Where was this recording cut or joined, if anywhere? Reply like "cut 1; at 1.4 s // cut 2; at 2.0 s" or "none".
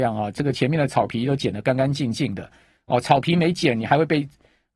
none